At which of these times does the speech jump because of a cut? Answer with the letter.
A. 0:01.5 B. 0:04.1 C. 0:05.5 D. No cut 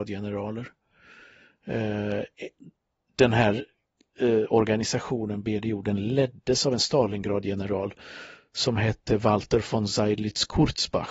D